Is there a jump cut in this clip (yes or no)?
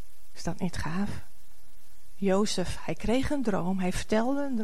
no